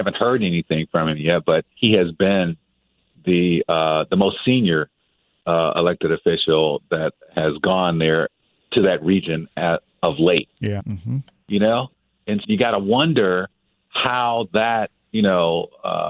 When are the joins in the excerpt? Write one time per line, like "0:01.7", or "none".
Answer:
0:01.7
0:10.8
0:12.4